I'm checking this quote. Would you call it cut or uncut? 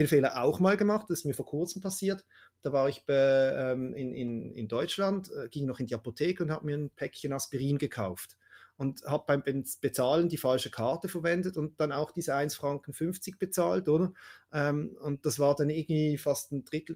uncut